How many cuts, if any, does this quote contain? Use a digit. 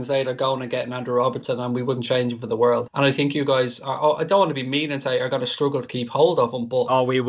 1